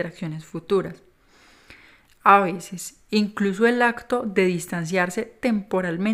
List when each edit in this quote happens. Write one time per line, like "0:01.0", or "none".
none